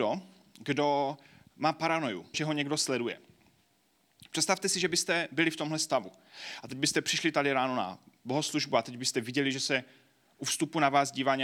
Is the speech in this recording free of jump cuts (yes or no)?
no